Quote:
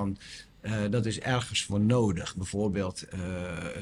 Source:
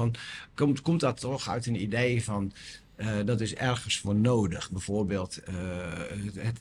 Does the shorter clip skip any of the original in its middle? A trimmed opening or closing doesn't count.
no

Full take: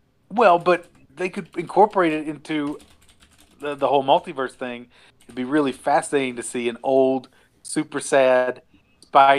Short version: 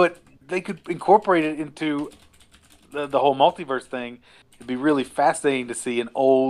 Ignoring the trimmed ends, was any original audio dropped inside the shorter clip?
no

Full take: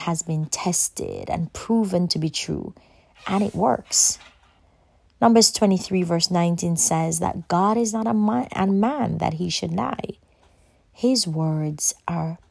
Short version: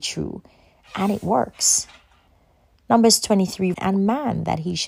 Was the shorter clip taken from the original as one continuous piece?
no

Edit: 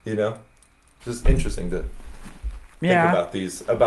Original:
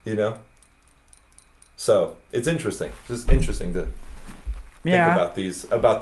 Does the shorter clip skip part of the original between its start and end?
yes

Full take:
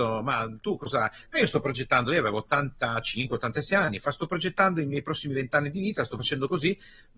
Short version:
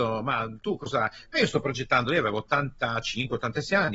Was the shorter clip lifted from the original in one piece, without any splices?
yes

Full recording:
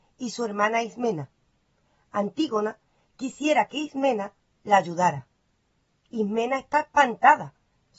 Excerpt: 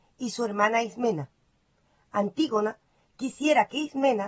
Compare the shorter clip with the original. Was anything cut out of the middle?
no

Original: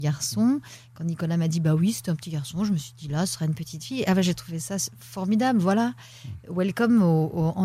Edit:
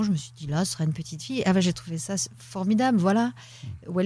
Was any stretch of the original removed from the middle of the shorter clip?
no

